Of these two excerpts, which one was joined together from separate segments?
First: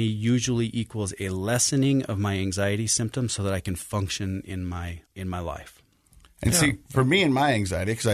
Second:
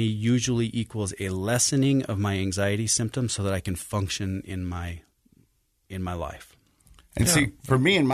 first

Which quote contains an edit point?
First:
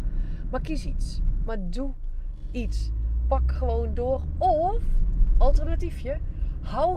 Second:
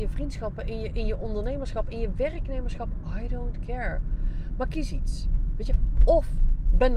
first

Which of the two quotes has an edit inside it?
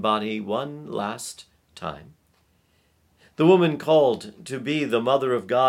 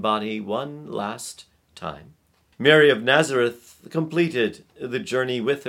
second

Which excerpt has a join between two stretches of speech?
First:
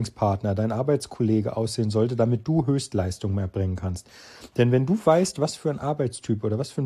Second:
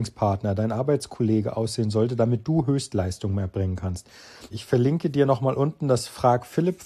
second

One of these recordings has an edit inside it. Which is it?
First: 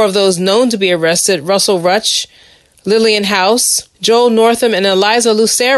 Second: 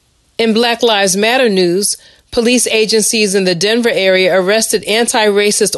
first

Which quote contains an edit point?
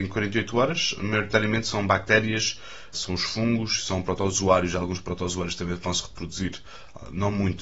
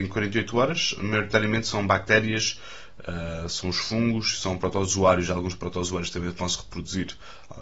first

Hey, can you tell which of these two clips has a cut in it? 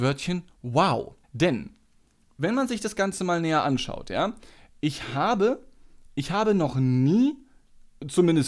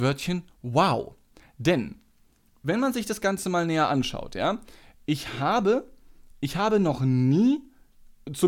first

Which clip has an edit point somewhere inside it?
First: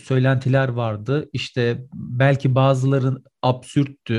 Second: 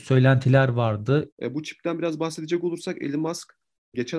second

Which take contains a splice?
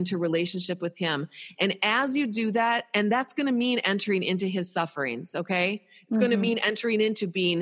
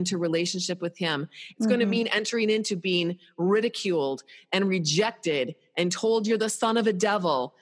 second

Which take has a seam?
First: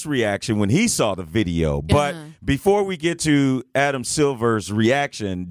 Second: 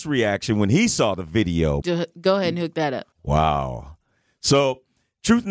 second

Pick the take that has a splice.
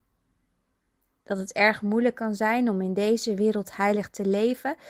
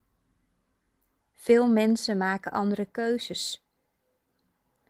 second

